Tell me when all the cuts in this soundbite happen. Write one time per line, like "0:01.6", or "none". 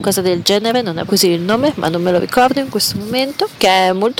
0:01.1